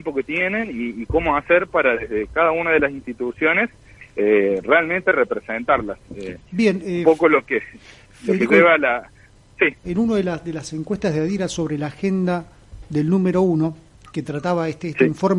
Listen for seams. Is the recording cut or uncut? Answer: cut